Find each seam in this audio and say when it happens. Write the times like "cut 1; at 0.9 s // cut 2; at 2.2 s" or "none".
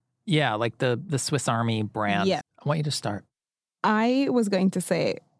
cut 1; at 2.4 s